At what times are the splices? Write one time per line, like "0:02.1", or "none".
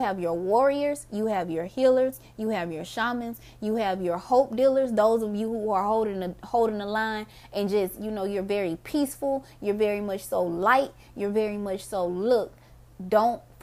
none